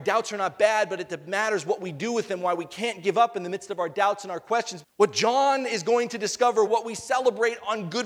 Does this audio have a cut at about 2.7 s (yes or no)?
no